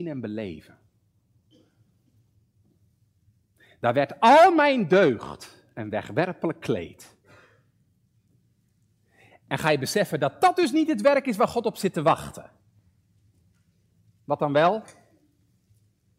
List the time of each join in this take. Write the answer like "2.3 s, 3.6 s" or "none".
none